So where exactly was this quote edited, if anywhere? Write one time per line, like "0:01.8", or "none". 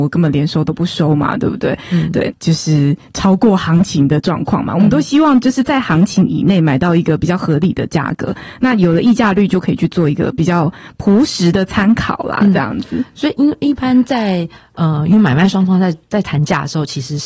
0:02.3